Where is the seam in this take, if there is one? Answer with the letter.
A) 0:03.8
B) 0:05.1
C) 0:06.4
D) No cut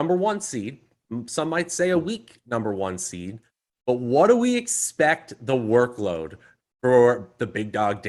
D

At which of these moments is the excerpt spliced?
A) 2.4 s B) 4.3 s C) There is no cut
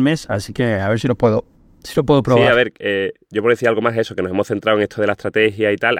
C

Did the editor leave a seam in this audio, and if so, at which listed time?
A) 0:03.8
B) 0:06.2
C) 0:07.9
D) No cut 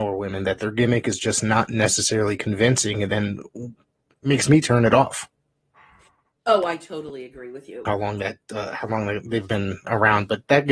C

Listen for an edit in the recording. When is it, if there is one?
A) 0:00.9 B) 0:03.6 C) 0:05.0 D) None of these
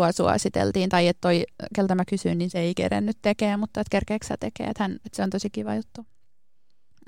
C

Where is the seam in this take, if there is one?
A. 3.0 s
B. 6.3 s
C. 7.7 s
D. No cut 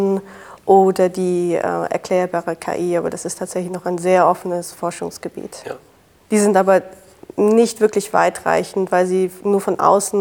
B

